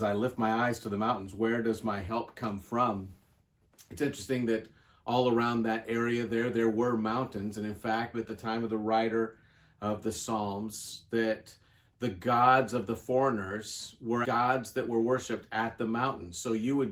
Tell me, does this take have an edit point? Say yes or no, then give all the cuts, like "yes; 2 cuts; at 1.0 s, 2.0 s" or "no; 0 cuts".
yes; 2 cuts; at 8.1 s, 14.2 s